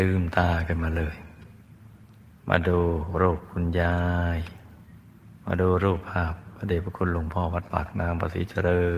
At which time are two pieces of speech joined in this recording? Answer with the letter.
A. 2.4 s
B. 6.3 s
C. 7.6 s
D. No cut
D